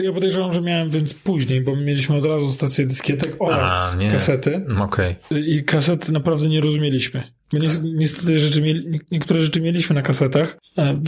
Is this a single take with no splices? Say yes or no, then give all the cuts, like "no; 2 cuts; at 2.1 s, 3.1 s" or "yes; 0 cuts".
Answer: yes; 0 cuts